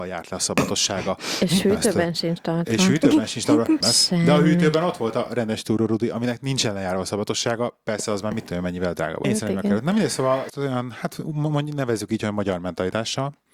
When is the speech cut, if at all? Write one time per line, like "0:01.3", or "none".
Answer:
0:03.8
0:09.2
0:10.5